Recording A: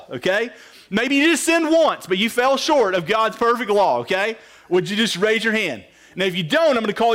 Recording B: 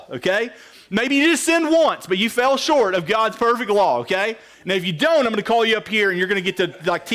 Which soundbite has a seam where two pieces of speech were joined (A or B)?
B